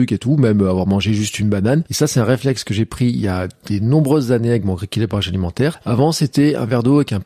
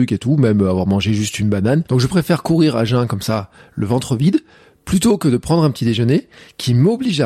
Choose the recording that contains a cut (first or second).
first